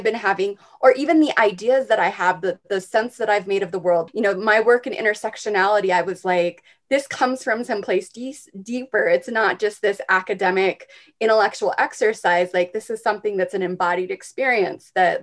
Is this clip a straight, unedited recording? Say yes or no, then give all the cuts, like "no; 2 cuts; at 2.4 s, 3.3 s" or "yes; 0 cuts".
no; 1 cut; at 4.1 s